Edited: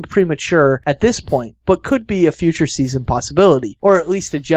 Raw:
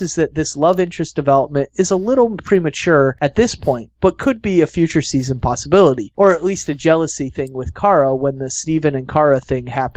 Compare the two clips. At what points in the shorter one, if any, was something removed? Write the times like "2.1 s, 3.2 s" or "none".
none